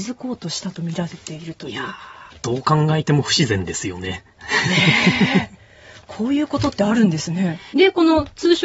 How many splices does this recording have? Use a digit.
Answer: 1